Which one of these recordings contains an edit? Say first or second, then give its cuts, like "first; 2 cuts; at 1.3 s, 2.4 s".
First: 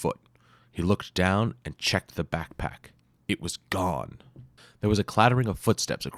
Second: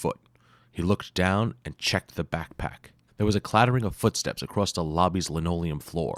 second; 1 cut; at 3.1 s